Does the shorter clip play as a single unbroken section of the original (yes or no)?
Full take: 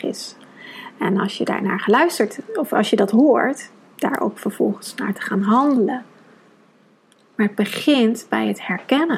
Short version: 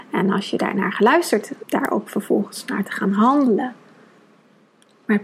no